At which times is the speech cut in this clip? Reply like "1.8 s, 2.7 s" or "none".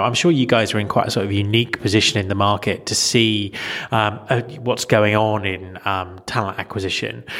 none